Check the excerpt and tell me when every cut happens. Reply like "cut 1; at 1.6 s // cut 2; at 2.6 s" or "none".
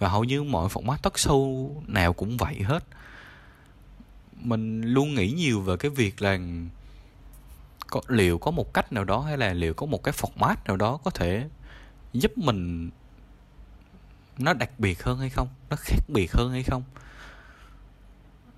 none